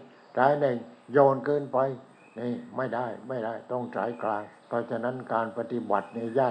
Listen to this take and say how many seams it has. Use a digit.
1